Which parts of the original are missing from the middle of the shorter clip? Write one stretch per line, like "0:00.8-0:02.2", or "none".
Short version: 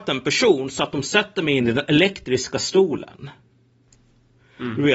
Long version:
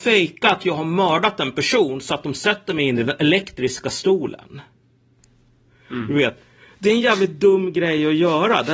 none